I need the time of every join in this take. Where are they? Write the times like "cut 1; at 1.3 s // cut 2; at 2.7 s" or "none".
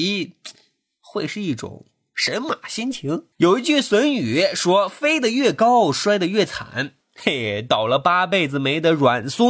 cut 1; at 3.3 s // cut 2; at 7.0 s